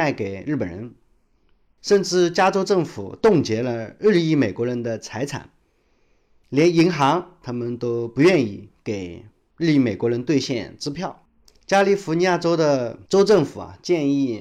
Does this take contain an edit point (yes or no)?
no